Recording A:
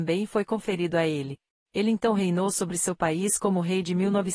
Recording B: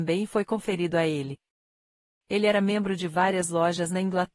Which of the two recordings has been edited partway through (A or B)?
A